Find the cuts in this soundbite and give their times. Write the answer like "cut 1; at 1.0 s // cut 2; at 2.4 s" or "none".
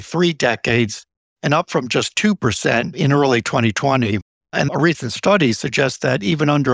cut 1; at 4.4 s